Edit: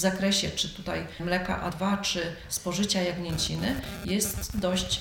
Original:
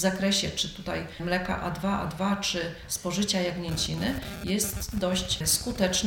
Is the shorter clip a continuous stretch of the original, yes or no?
no